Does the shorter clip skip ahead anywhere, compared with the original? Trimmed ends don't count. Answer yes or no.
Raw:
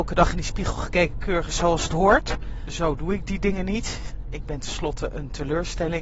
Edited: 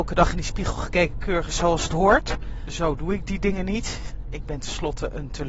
no